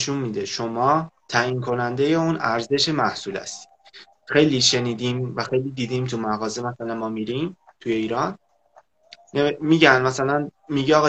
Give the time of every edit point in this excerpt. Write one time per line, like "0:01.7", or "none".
0:01.2